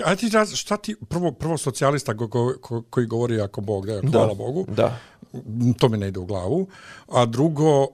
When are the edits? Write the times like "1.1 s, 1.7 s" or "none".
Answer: none